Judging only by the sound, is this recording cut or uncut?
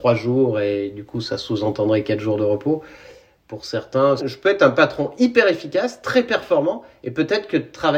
cut